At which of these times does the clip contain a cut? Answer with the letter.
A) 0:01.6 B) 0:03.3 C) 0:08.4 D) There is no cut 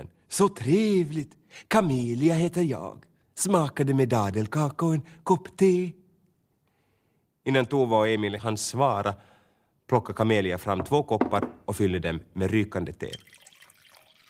C